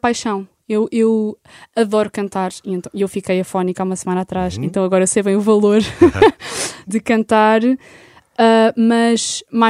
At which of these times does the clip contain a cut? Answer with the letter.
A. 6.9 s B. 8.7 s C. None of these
A